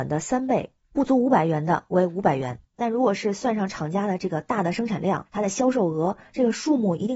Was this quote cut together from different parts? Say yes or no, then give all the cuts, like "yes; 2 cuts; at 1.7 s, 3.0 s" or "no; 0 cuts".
yes; 1 cut; at 2.7 s